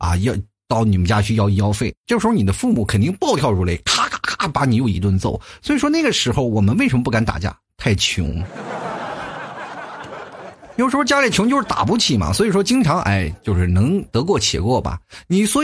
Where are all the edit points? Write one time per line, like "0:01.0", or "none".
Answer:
none